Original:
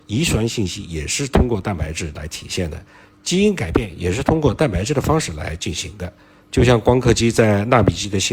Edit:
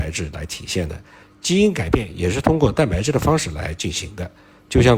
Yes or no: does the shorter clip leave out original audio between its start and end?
no